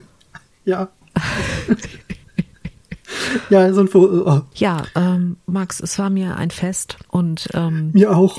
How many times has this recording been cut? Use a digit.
2